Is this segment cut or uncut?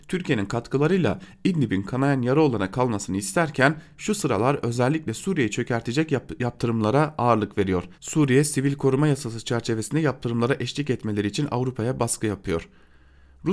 cut